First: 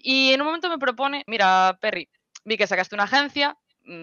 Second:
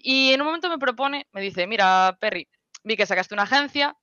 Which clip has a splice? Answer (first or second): first